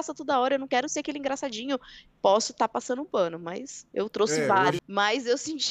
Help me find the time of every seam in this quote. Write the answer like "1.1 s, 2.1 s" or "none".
2.1 s, 4.8 s